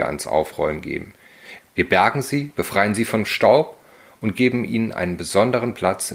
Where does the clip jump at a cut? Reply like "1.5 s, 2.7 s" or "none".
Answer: 1.6 s

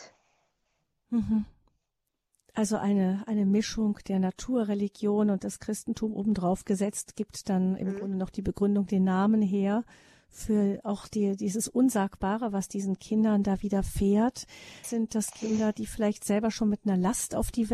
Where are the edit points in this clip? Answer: 14.8 s

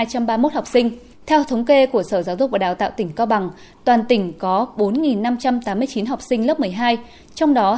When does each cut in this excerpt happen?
1.1 s, 3.7 s

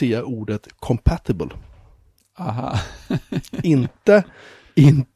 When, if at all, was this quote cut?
none

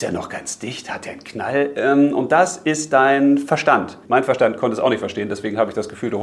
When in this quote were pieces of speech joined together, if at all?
4.0 s

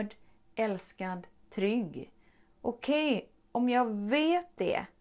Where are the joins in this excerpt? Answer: none

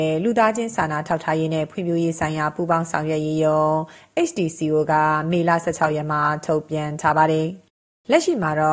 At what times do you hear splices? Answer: none

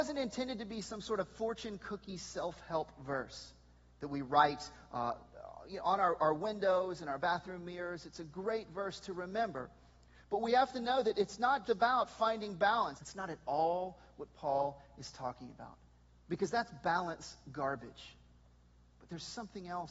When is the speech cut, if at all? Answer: 11.6 s, 13.0 s

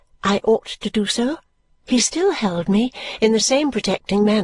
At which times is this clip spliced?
1.7 s

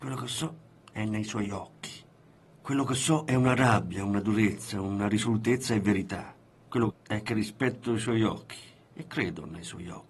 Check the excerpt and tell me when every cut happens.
6.9 s

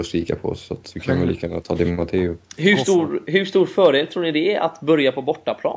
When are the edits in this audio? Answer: 2.4 s

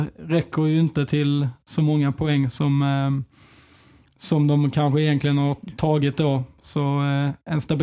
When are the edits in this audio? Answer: none

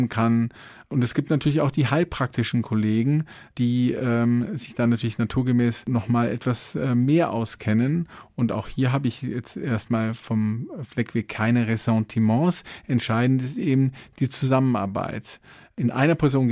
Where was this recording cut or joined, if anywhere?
none

